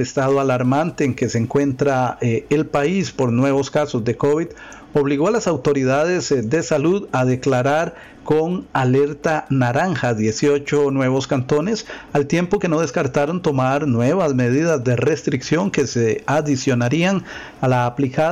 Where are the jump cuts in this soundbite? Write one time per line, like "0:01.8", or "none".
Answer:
none